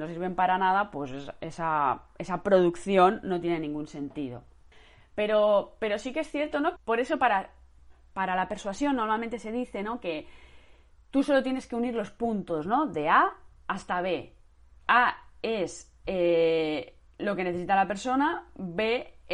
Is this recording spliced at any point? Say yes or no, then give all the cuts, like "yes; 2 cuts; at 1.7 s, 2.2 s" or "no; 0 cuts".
yes; 1 cut; at 6.8 s